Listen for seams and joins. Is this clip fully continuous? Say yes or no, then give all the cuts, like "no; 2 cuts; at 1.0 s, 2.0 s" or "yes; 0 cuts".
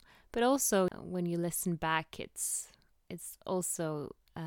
no; 1 cut; at 0.9 s